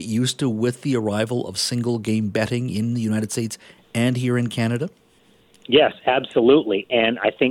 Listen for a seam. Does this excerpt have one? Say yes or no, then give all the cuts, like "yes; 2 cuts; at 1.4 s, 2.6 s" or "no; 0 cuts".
no; 0 cuts